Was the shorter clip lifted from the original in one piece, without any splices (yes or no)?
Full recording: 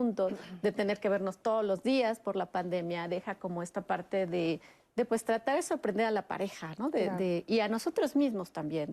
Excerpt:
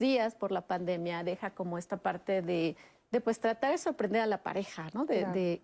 yes